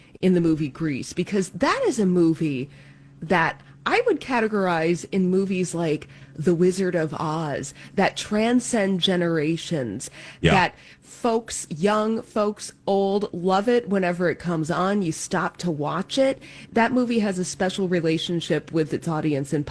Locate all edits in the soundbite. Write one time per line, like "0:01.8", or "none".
none